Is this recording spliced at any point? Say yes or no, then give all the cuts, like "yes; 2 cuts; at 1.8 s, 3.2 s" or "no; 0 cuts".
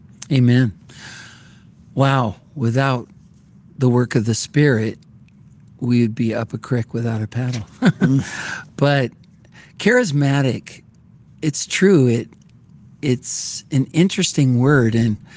no; 0 cuts